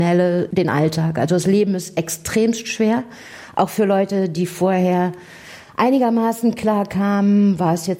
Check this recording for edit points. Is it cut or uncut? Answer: uncut